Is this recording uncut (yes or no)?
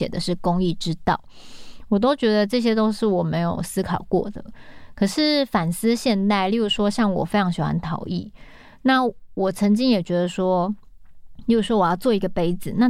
yes